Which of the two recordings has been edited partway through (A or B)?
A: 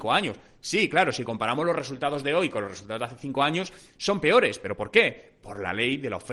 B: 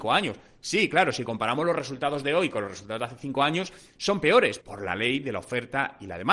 B